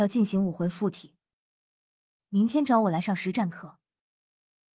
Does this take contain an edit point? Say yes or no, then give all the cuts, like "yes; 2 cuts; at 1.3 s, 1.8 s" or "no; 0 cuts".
yes; 1 cut; at 2.2 s